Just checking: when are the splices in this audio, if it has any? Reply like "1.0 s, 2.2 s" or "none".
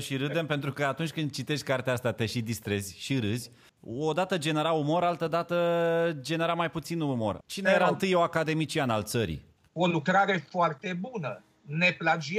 3.7 s, 7.4 s, 9.6 s